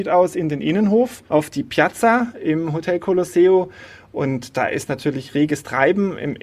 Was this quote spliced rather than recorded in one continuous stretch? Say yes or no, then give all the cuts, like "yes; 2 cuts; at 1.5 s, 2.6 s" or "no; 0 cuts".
yes; 1 cut; at 1.3 s